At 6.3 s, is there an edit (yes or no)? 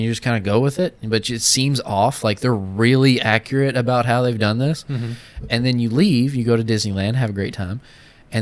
no